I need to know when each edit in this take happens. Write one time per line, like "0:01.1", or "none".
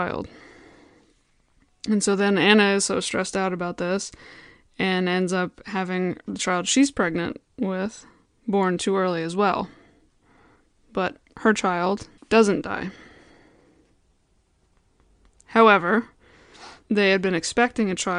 0:12.2
0:16.8